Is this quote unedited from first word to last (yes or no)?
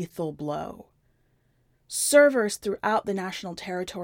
yes